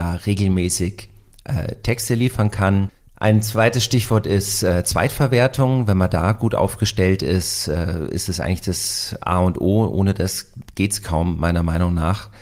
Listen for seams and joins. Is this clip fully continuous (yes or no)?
yes